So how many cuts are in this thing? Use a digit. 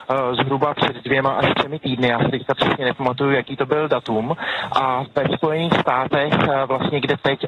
0